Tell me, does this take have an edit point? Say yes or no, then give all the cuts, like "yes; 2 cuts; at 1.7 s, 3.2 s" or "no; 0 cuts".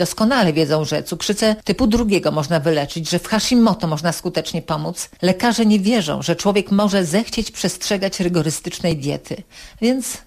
no; 0 cuts